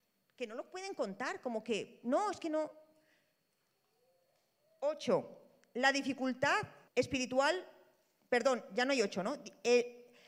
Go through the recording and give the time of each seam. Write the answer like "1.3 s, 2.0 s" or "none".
6.9 s